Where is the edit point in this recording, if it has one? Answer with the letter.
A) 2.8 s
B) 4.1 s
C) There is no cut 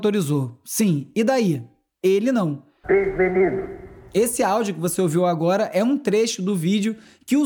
A